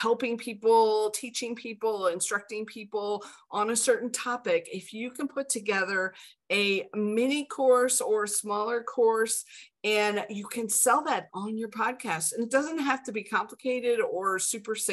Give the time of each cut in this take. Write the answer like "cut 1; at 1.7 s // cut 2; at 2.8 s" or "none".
cut 1; at 11.3 s